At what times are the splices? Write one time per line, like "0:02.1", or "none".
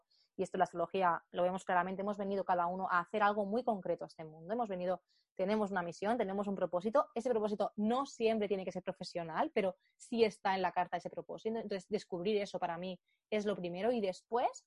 none